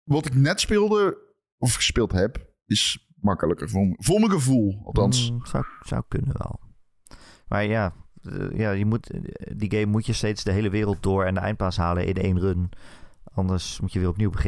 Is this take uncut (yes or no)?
yes